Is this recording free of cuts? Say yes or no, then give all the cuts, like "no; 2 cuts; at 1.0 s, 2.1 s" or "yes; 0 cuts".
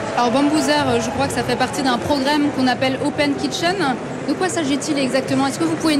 yes; 0 cuts